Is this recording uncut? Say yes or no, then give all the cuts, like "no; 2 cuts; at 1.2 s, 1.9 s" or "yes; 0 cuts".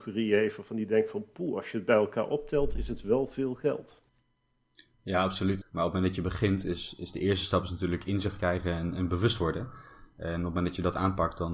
no; 1 cut; at 5.6 s